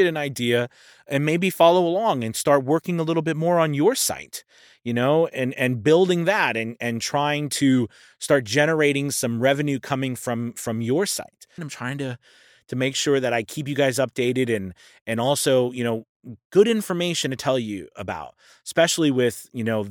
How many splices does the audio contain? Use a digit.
1